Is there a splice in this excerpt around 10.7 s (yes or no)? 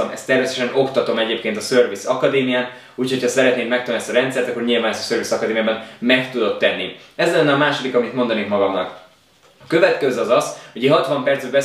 no